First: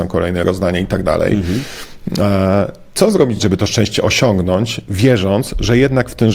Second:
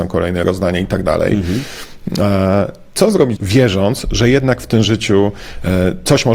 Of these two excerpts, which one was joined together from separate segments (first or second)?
second